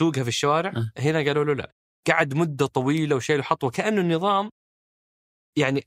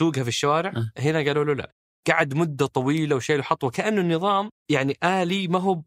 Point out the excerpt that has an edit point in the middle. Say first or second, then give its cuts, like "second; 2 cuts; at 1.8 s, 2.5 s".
second; 1 cut; at 4.6 s